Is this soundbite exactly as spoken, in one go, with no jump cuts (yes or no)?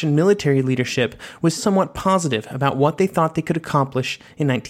no